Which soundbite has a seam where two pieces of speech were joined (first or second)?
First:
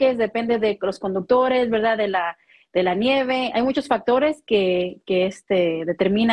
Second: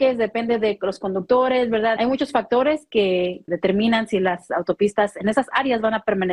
second